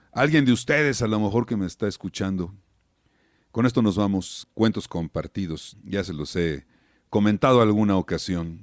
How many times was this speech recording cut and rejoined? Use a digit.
2